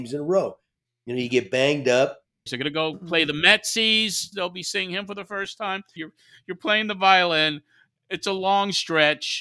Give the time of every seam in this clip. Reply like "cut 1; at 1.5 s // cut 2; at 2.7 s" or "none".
cut 1; at 2.5 s // cut 2; at 4.3 s // cut 3; at 6.0 s